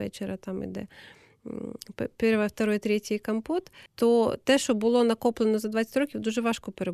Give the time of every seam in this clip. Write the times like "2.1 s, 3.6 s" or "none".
3.9 s